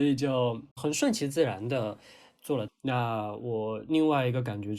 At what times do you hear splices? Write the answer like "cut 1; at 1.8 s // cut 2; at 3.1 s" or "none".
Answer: cut 1; at 2.7 s